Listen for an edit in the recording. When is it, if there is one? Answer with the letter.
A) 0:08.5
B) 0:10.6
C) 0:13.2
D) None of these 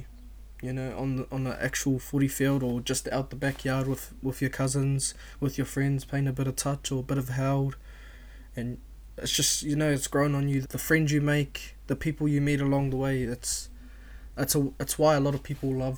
B